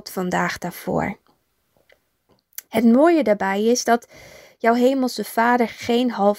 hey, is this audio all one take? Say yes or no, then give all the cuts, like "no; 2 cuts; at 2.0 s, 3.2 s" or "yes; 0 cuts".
yes; 0 cuts